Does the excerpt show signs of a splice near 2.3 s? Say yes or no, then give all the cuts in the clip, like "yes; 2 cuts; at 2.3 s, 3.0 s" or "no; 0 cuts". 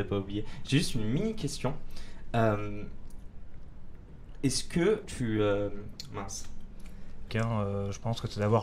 no; 2 cuts; at 5.0 s, 7.3 s